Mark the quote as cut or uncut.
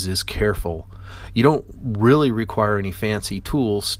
uncut